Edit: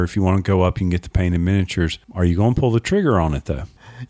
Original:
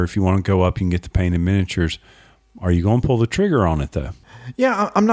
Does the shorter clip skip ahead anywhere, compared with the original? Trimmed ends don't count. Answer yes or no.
yes